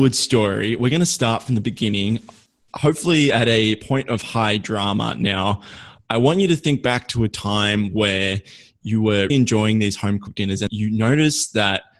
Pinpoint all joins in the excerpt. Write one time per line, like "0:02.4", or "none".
0:09.3
0:10.7